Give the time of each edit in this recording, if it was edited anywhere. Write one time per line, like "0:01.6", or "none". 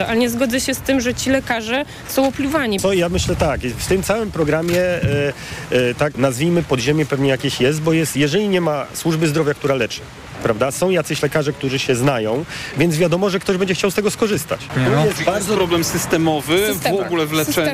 0:06.1